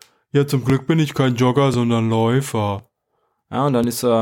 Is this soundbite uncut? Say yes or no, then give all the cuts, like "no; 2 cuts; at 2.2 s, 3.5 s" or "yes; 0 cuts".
yes; 0 cuts